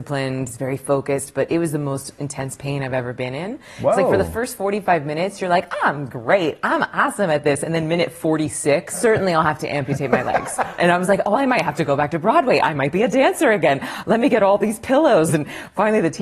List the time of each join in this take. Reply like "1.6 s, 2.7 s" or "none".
8.9 s, 10.8 s, 15.3 s

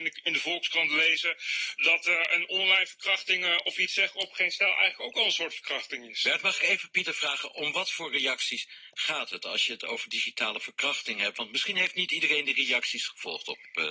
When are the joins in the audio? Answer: none

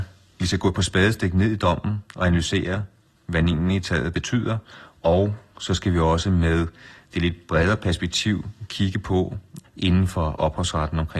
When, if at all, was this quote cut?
9.6 s

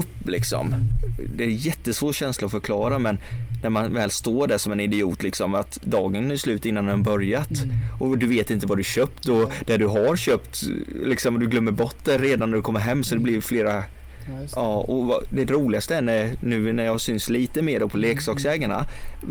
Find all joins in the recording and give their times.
none

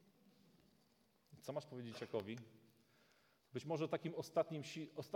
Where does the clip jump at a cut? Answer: none

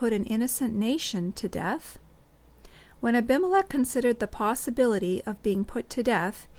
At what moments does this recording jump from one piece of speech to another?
none

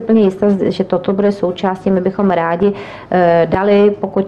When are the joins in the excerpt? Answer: none

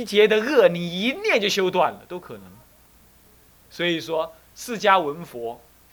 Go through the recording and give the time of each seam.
none

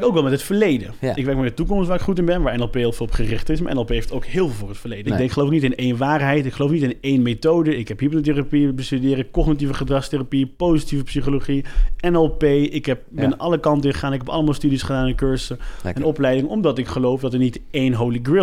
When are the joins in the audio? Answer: 5.1 s

